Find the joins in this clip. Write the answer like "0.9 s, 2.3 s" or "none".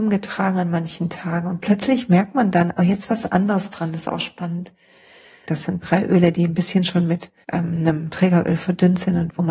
5.4 s, 7.4 s